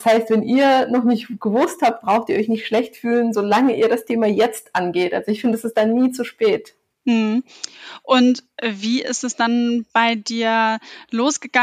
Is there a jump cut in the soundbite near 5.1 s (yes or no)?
no